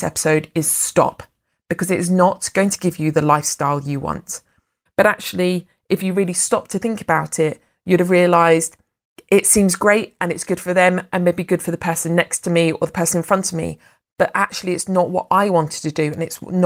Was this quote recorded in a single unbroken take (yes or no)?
no